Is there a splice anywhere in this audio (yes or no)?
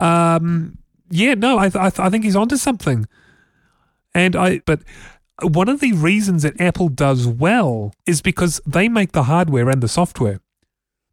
yes